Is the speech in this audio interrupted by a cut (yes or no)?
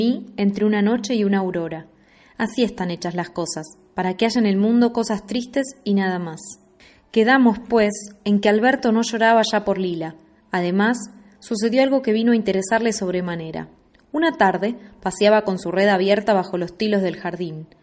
no